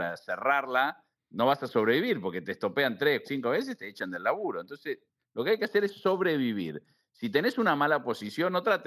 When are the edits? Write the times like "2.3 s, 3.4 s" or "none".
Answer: 3.2 s